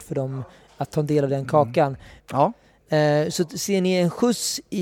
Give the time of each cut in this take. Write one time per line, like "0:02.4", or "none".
0:02.2